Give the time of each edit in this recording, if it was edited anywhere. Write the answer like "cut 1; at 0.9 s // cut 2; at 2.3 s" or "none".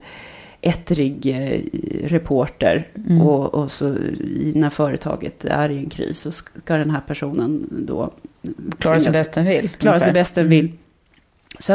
none